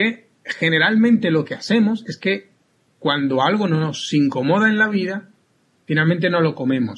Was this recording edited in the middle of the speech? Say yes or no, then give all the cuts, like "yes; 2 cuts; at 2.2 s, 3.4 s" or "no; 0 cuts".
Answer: no; 0 cuts